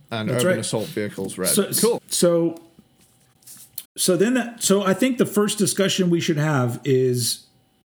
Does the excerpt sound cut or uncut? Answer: cut